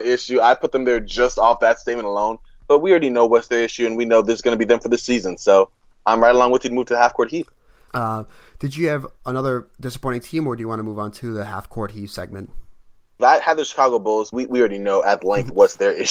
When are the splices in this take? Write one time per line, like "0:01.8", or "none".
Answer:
0:07.9
0:13.2
0:14.3